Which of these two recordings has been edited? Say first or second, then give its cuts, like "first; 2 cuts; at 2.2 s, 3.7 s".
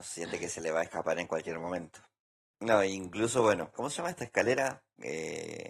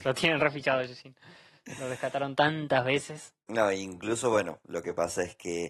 first; 2 cuts; at 2.5 s, 3.7 s